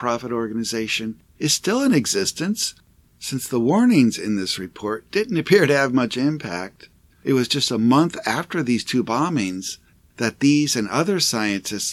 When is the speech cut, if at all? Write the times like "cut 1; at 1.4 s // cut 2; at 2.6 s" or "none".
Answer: cut 1; at 3.0 s